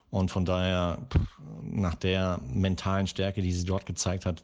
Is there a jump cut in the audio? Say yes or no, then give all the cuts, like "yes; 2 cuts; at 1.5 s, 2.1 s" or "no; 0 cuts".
no; 0 cuts